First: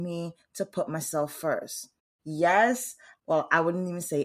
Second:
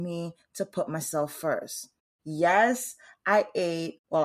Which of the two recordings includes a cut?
first; 1 cut; at 3.2 s

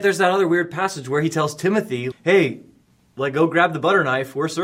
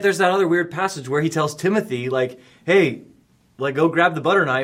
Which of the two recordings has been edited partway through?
first; 1 cut; at 2.1 s

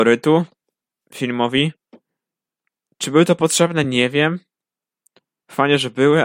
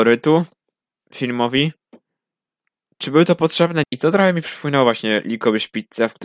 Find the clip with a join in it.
second; 1 cut; at 3.8 s

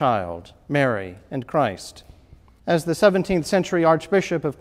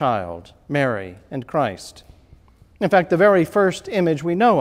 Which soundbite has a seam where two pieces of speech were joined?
first; 1 cut; at 2.6 s

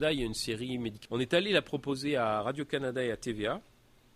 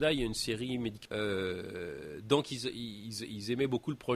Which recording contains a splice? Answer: first; 1 cut; at 1.1 s

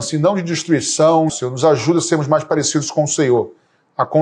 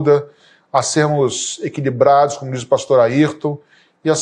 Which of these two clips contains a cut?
first; 1 cut; at 1.3 s

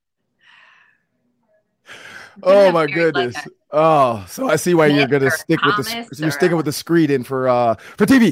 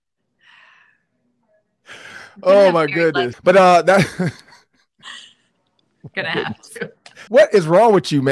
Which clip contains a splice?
second; 2 cuts; at 3.3 s, 7.3 s

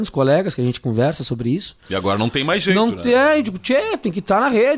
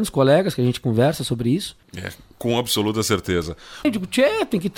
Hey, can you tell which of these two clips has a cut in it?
second; 2 cuts; at 1.8 s, 3.8 s

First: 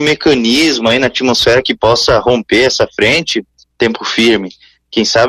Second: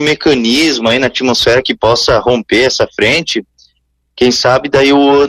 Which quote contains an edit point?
first; 1 cut; at 3.6 s

